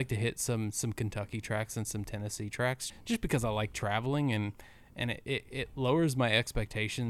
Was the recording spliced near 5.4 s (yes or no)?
no